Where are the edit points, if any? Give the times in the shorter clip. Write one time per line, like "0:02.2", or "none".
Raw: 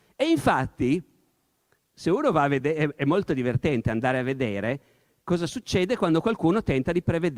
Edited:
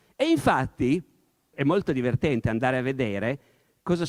0:01.5